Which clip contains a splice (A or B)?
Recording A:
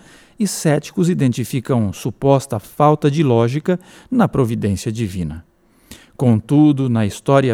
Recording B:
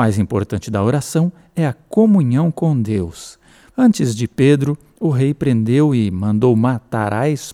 B